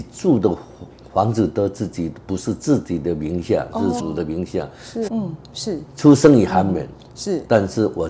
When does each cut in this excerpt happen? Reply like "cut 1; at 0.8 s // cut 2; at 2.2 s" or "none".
cut 1; at 4.0 s // cut 2; at 5.1 s

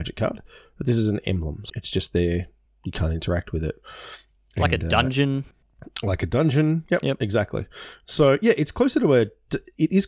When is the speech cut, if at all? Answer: cut 1; at 1.7 s

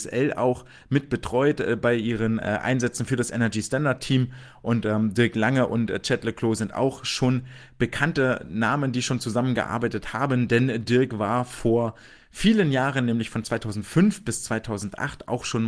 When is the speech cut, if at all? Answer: none

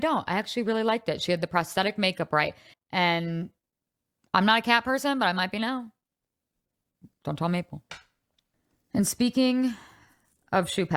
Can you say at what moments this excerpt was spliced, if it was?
cut 1; at 2.7 s

